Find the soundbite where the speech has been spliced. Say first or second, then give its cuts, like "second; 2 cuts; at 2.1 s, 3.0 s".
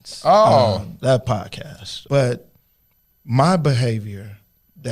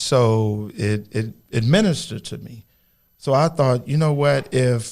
first; 1 cut; at 2.1 s